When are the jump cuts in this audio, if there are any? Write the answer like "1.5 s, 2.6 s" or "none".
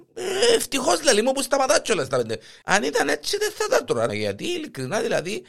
2.6 s, 4.1 s

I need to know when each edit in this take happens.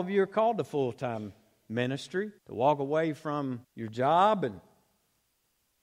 2.4 s, 3.6 s

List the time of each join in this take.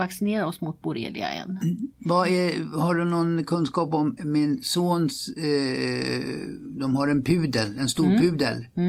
4.2 s

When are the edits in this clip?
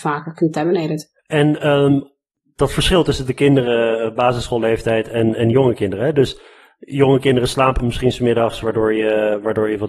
1.2 s

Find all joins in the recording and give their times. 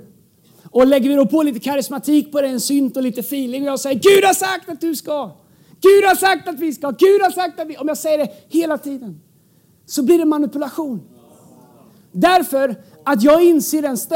none

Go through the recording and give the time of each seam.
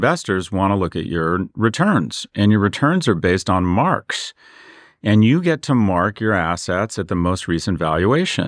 none

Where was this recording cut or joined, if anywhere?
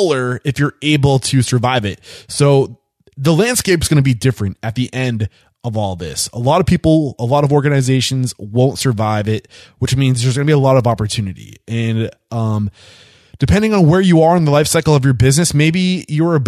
none

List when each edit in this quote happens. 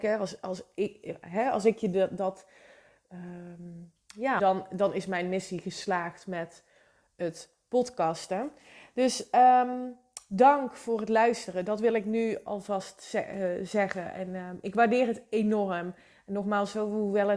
4.4 s

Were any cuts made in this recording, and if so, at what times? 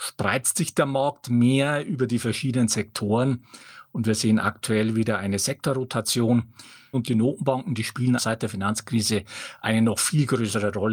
6.9 s, 8.2 s

